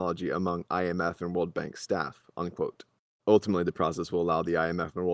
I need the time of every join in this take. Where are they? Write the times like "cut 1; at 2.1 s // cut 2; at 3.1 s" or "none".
none